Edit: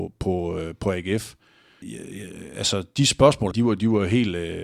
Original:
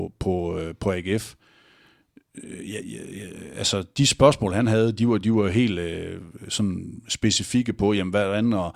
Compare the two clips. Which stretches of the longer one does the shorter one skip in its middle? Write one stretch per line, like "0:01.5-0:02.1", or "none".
0:01.8-0:02.8
0:04.5-0:04.9